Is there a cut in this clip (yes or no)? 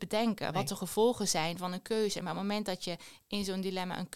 no